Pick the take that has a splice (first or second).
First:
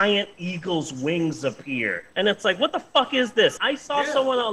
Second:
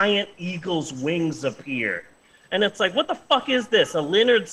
first